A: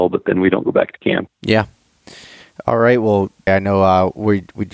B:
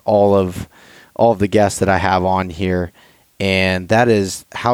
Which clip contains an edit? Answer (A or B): A